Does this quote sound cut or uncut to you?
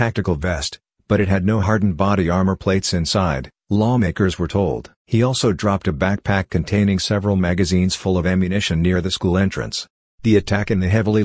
cut